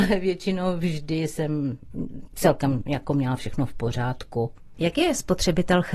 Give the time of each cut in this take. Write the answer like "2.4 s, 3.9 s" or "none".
4.7 s